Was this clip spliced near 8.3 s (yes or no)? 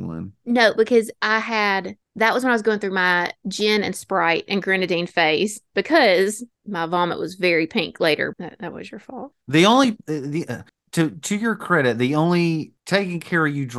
yes